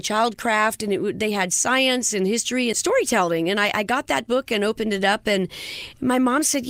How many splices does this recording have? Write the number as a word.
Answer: one